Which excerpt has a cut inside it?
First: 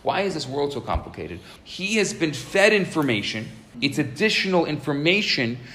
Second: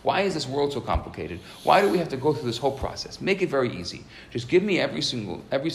first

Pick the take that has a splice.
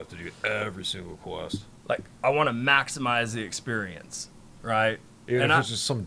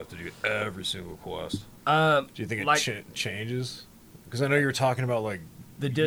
second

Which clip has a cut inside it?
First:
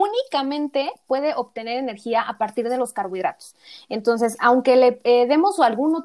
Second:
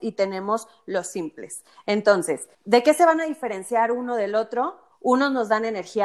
second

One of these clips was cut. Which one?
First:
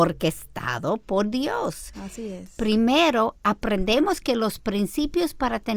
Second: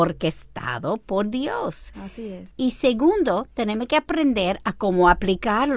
second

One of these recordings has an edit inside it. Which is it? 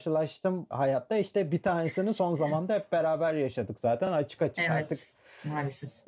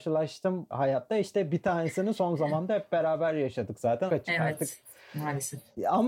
second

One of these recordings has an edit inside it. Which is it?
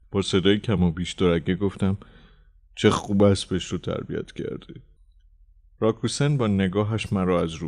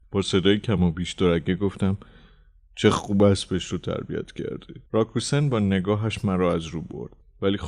second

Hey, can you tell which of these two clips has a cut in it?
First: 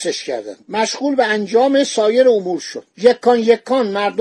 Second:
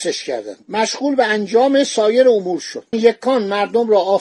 second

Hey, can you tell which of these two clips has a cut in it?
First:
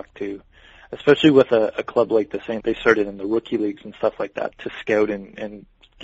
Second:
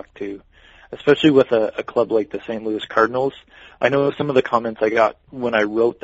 first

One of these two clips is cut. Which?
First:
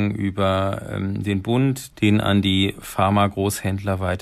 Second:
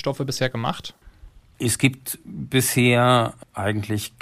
first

